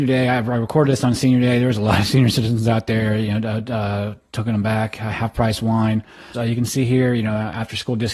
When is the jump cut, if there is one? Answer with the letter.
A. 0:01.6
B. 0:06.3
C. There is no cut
B